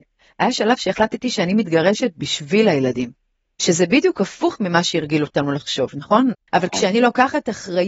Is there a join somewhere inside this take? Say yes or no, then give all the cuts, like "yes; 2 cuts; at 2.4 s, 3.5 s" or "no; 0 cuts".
yes; 1 cut; at 6.3 s